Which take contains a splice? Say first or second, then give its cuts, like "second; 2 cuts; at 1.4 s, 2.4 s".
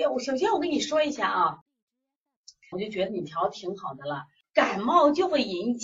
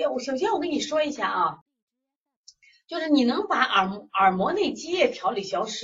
first; 2 cuts; at 2.7 s, 4.4 s